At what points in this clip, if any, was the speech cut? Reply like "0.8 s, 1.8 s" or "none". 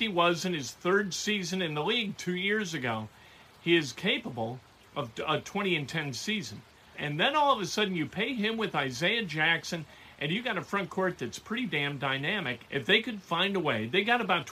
6.9 s, 12.7 s